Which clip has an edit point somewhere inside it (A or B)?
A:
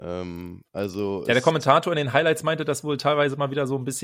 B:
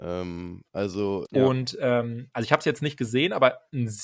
B